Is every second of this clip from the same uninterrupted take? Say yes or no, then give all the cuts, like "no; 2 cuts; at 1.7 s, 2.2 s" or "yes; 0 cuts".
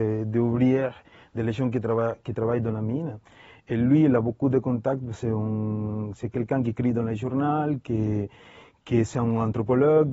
yes; 0 cuts